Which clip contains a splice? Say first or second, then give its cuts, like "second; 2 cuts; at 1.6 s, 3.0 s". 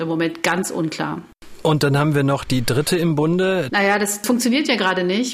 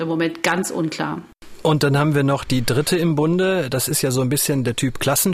first; 1 cut; at 3.7 s